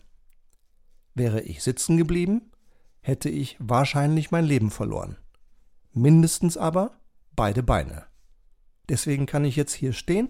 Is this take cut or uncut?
cut